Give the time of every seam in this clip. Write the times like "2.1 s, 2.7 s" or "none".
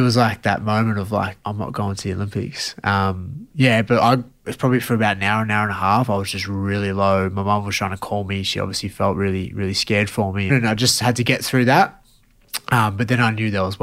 1.4 s, 10.5 s